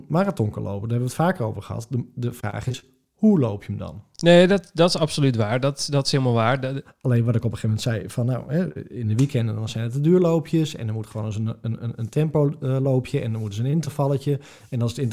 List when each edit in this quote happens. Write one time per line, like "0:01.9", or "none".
0:06.8